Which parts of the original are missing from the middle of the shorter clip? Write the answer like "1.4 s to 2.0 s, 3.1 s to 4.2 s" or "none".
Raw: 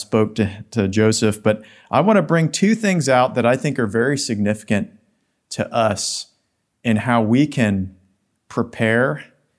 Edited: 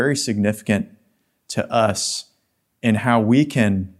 none